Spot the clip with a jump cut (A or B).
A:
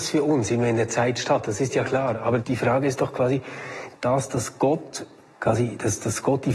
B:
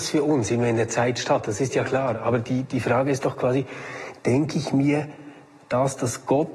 A